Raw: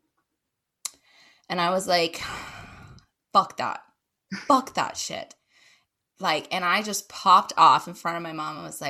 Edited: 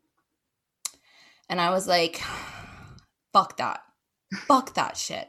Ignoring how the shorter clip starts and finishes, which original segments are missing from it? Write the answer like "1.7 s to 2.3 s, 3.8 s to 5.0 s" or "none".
none